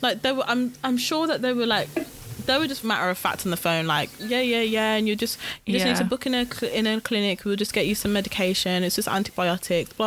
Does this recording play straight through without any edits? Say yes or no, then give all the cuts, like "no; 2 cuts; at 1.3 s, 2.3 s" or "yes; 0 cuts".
no; 1 cut; at 2.8 s